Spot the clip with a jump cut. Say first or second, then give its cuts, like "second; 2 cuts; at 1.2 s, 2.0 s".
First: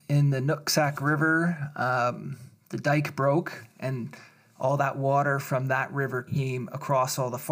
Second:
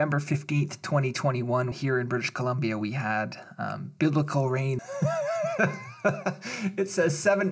second; 2 cuts; at 1.7 s, 4.8 s